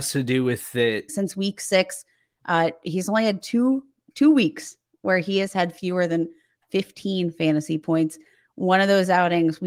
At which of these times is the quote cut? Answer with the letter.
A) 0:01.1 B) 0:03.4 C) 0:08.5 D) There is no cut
A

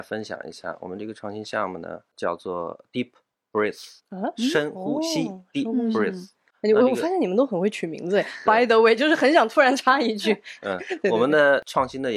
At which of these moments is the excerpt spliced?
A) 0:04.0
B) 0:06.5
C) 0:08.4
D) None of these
A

